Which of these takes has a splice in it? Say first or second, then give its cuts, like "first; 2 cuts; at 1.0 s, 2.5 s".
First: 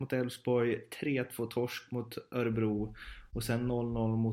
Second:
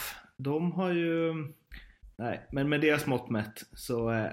second; 1 cut; at 2.1 s